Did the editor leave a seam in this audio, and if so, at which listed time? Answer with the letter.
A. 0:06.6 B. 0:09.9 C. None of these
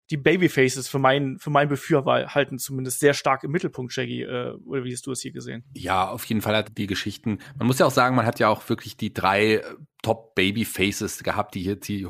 A